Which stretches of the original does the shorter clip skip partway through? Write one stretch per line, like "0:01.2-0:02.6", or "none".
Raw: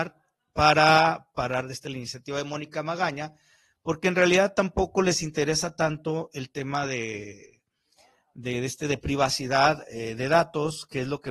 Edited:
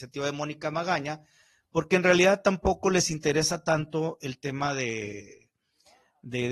none